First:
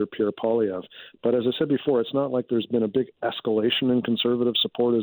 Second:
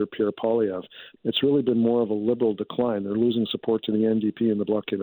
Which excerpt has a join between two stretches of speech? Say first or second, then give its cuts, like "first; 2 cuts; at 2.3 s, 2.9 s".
second; 1 cut; at 1.2 s